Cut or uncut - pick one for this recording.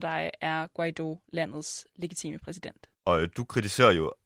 cut